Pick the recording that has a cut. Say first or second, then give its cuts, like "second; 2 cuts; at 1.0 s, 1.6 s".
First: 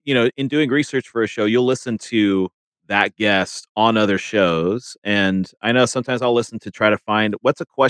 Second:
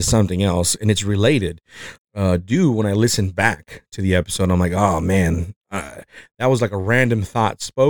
second; 1 cut; at 2.0 s